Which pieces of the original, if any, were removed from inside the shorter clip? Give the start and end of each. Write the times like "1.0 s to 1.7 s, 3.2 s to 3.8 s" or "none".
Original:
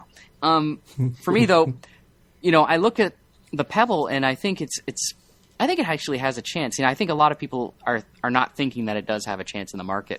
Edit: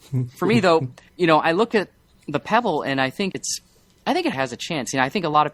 1.9 s to 2.3 s, 4.6 s to 4.8 s, 5.9 s to 6.2 s